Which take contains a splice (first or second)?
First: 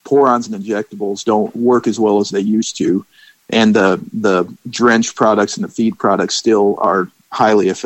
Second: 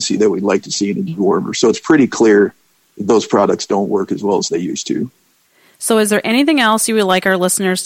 first